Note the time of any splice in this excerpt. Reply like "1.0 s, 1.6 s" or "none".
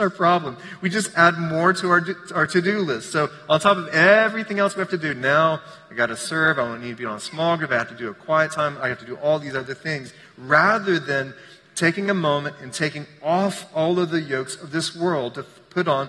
none